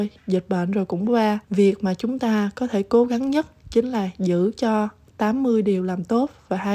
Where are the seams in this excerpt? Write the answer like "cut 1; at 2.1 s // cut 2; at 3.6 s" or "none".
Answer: cut 1; at 1.4 s